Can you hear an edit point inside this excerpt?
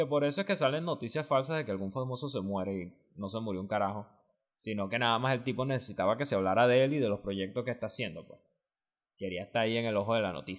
no; 0 cuts

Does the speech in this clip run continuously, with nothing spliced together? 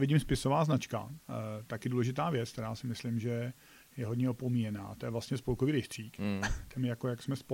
yes; 0 cuts

